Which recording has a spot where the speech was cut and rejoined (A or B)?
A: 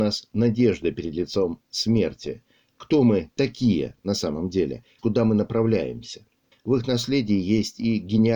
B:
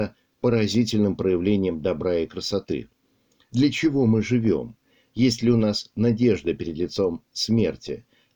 A